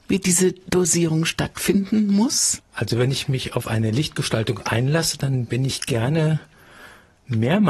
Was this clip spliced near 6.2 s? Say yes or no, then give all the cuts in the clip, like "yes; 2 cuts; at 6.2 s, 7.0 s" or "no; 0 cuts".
no; 1 cut; at 2.6 s